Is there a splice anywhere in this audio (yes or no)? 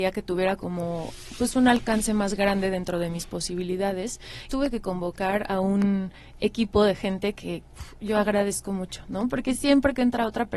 yes